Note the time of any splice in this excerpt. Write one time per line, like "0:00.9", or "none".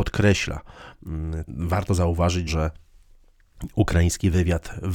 0:01.5
0:02.5